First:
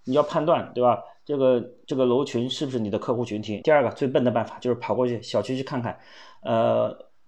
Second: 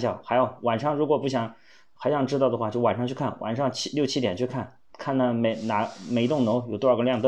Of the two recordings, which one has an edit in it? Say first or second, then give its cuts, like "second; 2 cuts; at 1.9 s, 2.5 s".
first; 1 cut; at 3.6 s